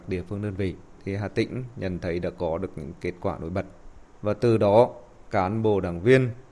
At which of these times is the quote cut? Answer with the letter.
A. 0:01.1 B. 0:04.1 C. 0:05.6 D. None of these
B